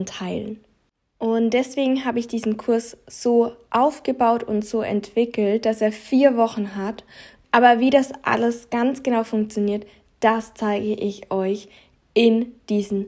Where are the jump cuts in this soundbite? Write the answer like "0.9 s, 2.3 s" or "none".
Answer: 7.4 s